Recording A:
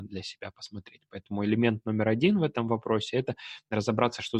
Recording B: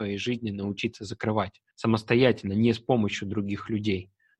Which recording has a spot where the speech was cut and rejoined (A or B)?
B